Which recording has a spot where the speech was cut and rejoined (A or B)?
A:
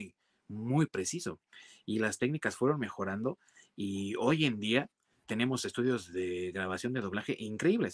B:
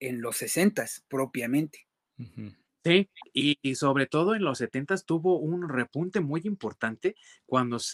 A